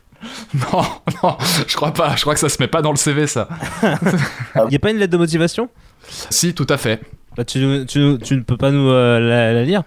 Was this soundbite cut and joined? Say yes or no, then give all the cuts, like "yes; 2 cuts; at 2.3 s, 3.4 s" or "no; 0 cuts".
yes; 2 cuts; at 4.7 s, 6.3 s